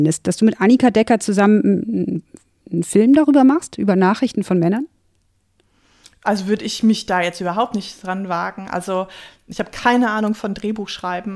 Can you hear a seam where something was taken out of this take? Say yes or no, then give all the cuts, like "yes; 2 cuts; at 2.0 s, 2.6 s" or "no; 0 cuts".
no; 0 cuts